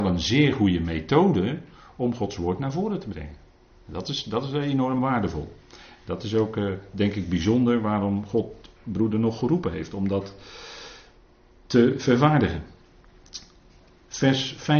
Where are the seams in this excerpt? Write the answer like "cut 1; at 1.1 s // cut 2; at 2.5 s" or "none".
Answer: none